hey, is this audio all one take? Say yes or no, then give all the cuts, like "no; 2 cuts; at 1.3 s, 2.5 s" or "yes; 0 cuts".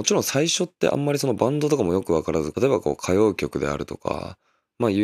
no; 1 cut; at 2.5 s